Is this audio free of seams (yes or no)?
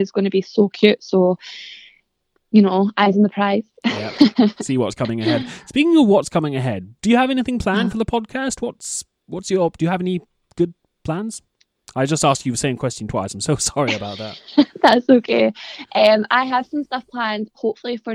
yes